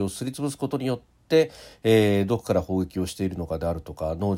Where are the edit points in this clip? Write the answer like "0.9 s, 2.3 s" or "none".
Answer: none